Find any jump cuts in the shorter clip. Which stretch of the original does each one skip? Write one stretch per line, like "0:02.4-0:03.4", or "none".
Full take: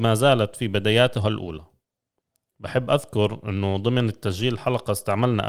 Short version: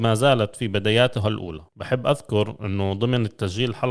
0:01.7-0:02.5